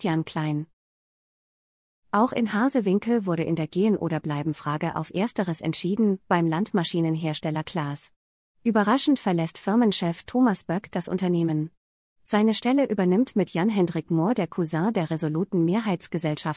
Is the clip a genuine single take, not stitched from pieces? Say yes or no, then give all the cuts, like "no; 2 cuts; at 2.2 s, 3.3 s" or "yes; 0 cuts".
yes; 0 cuts